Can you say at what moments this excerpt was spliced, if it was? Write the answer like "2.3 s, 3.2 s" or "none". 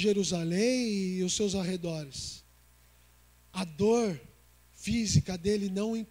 none